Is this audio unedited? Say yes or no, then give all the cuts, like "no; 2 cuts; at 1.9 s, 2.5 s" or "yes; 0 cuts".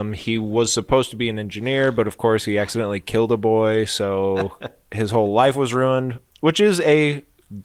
yes; 0 cuts